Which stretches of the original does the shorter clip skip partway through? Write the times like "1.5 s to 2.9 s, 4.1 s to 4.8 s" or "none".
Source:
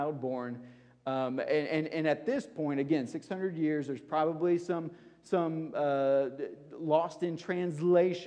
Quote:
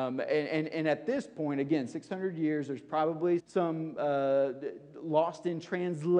4.6 s to 5.2 s